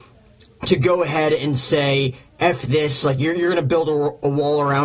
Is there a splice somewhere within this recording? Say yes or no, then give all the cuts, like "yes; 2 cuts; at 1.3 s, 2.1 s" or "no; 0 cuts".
no; 0 cuts